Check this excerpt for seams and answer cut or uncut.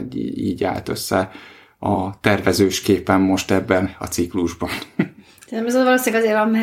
uncut